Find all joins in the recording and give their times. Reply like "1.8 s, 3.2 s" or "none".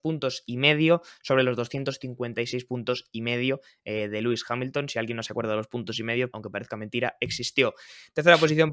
6.3 s